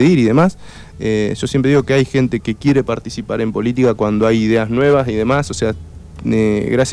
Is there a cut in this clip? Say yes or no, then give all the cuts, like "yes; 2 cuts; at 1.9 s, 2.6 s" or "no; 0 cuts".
yes; 2 cuts; at 0.9 s, 2.4 s